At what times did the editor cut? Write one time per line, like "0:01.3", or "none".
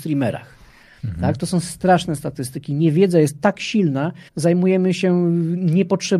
0:04.3

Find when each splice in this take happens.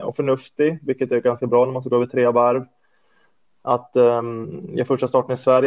none

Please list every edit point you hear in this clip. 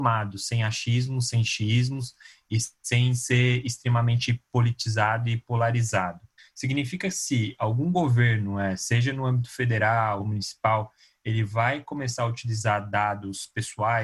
0:06.4
0:10.2

